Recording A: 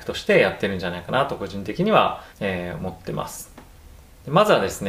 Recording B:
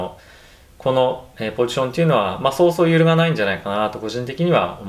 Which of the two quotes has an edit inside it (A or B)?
A